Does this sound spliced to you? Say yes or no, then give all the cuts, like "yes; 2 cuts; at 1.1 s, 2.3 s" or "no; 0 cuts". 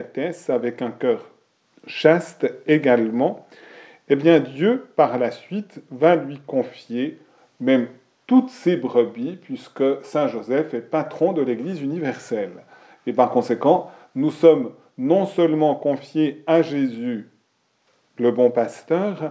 no; 0 cuts